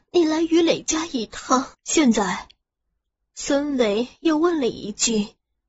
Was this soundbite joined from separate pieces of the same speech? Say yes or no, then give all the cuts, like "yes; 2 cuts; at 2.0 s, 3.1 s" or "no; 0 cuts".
yes; 1 cut; at 1.7 s